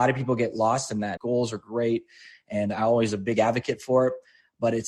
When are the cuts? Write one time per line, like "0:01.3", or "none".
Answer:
0:01.2